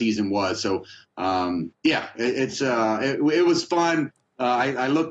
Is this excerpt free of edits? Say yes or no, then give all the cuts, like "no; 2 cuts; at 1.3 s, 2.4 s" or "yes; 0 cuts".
yes; 0 cuts